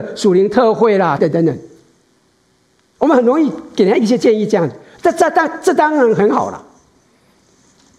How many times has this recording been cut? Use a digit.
1